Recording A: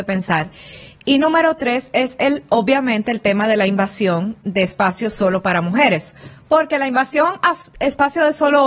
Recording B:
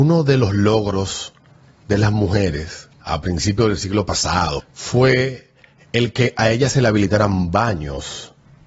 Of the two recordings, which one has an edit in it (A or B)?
B